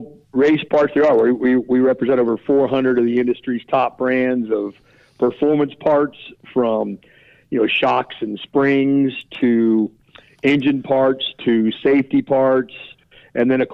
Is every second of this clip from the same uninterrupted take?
yes; 0 cuts

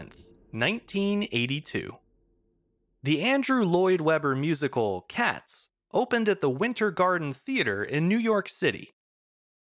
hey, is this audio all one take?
yes; 0 cuts

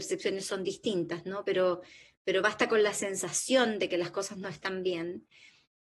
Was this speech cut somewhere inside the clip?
no; 0 cuts

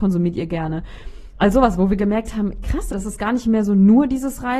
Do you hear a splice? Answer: yes; 1 cut; at 2.9 s

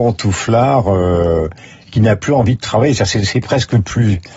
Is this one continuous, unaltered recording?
yes; 0 cuts

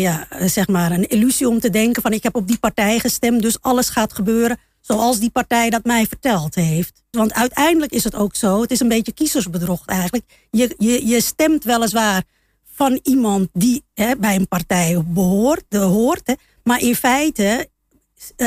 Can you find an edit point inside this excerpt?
yes; 1 cut; at 7.1 s

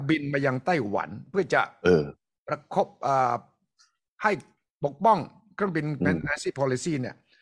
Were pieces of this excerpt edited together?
no; 0 cuts

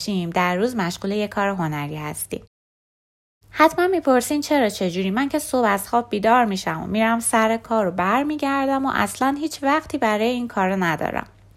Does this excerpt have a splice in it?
no; 0 cuts

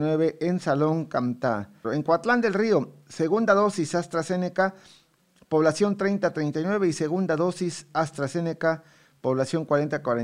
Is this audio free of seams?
no; 1 cut; at 1.8 s

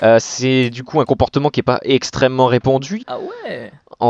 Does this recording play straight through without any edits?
no; 1 cut; at 3.0 s

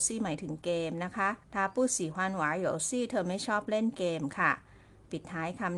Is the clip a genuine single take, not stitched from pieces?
no; 1 cut; at 1.4 s

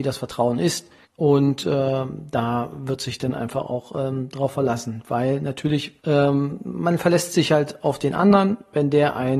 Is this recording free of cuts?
no; 2 cuts; at 1.0 s, 6.0 s

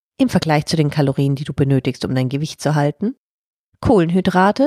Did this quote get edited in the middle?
no; 0 cuts

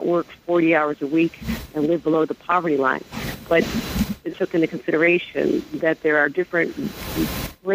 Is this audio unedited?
no; 1 cut; at 4.3 s

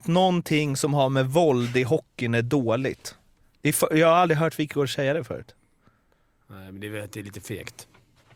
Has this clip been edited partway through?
no; 0 cuts

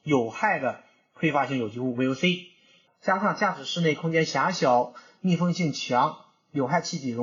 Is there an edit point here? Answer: yes; 1 cut; at 2.9 s

